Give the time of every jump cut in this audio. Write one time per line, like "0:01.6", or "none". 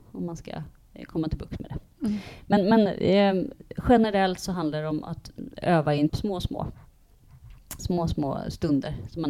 0:06.1
0:07.8

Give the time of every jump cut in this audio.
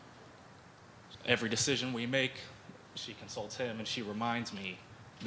0:01.1

